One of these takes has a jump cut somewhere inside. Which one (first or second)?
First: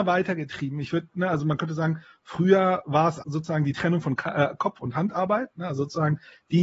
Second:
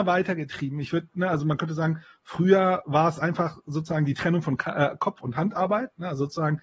first